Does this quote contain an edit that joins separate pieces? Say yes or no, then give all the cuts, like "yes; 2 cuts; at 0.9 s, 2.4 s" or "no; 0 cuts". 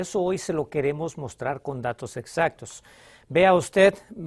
no; 0 cuts